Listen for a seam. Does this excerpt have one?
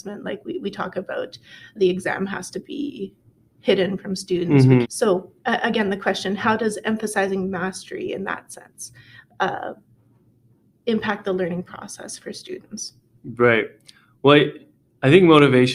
yes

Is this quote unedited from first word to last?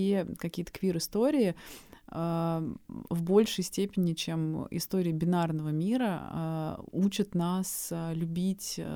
yes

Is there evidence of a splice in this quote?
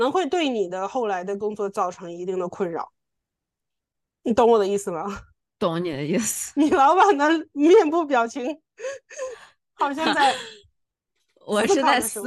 no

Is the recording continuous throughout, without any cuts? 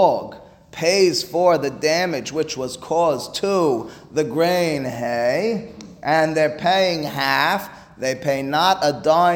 yes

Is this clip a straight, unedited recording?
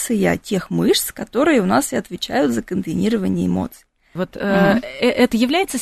no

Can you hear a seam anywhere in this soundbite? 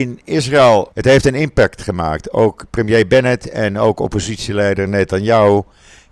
yes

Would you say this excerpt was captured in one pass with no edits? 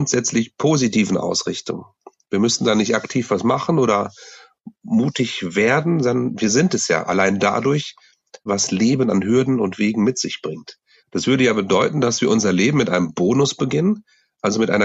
no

